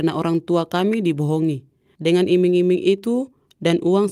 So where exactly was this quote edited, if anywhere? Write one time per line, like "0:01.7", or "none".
0:02.0